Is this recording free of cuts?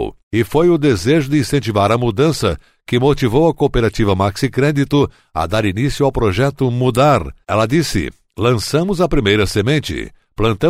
yes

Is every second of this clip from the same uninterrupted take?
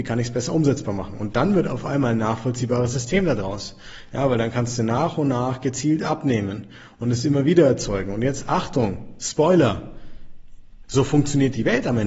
no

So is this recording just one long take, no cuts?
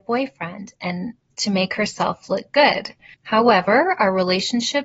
no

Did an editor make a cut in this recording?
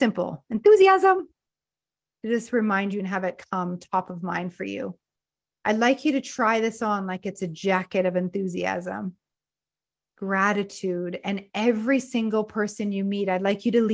no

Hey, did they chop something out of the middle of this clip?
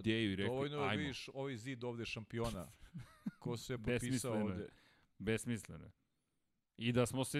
no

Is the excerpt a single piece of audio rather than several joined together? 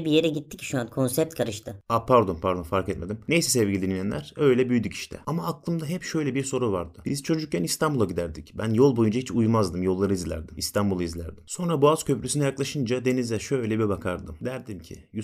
no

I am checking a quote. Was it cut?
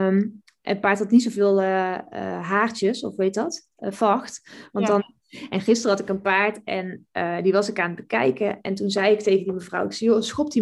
yes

